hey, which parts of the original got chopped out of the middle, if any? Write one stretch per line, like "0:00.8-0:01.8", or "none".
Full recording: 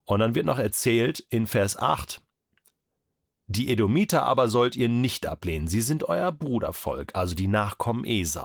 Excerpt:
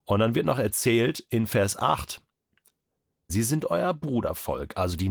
0:03.3-0:05.7